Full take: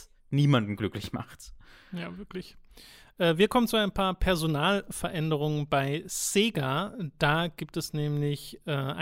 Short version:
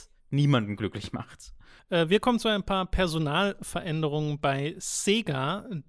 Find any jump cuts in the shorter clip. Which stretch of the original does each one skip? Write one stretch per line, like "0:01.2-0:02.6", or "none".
0:01.8-0:03.1